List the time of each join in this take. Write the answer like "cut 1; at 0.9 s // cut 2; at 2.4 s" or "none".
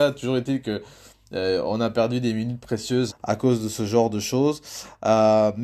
cut 1; at 3.1 s